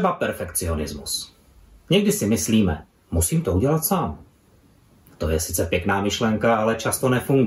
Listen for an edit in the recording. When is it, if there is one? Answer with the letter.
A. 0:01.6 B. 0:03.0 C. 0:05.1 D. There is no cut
B